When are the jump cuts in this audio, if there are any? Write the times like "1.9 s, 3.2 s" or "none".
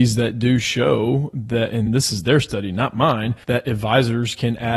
1.9 s, 3.4 s